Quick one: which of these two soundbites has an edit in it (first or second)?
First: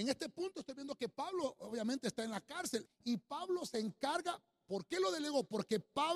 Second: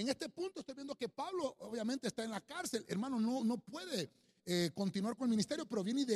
first